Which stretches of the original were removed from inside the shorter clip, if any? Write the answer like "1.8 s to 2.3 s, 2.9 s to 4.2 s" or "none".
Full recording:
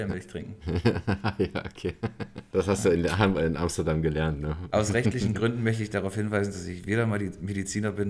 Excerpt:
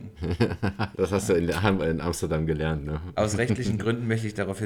1.4 s to 2.5 s

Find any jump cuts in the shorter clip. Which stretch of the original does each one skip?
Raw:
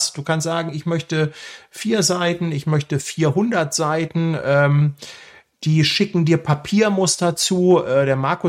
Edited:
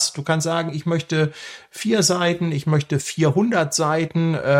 none

